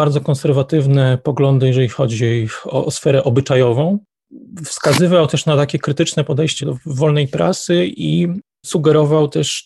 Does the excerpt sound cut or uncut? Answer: cut